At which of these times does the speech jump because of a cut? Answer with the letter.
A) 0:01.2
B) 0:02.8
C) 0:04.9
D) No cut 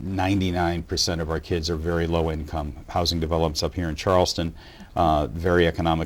D